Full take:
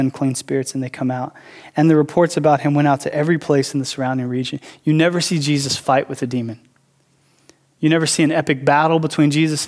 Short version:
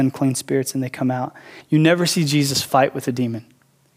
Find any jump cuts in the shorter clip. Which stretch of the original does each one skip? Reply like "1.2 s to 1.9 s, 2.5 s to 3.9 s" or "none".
1.6 s to 4.8 s